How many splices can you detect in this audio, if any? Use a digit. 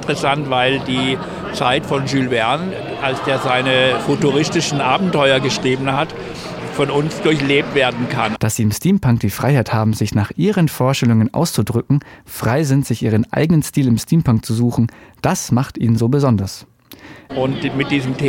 2